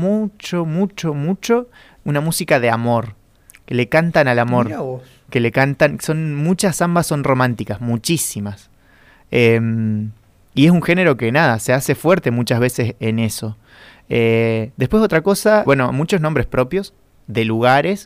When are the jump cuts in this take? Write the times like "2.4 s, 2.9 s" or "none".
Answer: 15.7 s